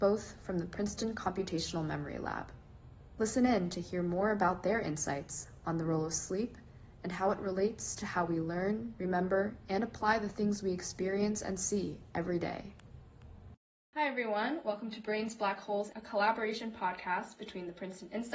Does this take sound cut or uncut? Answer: cut